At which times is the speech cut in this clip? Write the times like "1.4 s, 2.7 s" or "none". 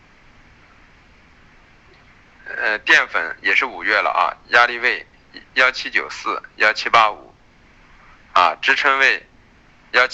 none